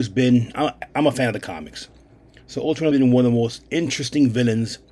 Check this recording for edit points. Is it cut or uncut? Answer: cut